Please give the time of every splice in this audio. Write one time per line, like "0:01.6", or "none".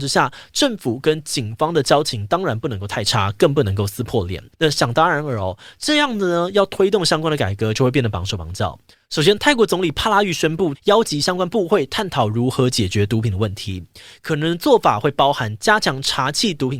0:04.5
0:08.9
0:10.7